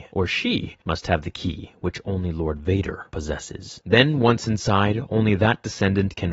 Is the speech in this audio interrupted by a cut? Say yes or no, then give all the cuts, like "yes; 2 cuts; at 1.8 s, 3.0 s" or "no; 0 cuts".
no; 0 cuts